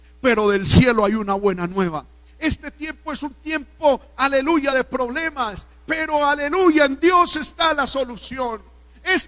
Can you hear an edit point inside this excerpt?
no; 0 cuts

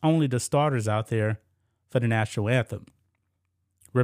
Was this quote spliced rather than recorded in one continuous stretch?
no; 0 cuts

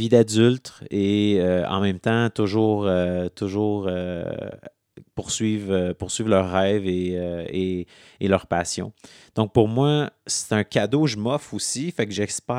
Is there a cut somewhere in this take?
no; 0 cuts

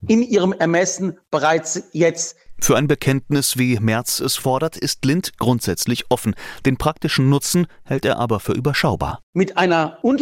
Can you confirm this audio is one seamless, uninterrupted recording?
yes; 0 cuts

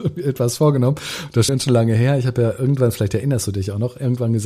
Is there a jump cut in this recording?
yes; 1 cut; at 1.5 s

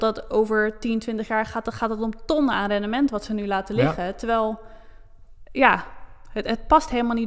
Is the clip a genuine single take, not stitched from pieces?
yes; 0 cuts

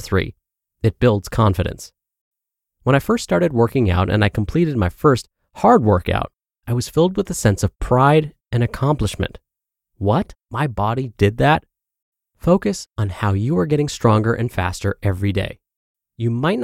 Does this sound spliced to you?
yes; 1 cut; at 11.1 s

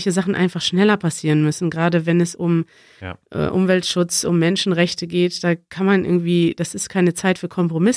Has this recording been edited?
no; 0 cuts

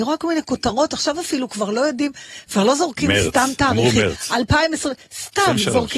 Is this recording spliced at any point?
no; 0 cuts

